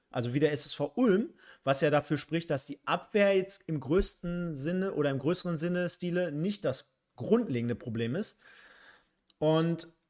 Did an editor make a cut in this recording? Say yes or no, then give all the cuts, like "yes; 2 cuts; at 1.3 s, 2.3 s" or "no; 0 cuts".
no; 0 cuts